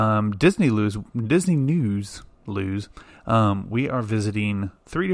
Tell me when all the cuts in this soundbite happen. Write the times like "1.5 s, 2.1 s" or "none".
none